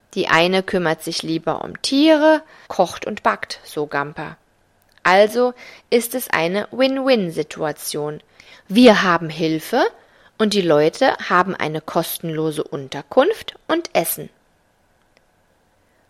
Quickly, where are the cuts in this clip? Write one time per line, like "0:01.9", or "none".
0:02.7